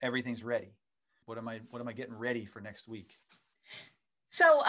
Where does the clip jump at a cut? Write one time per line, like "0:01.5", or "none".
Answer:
0:01.2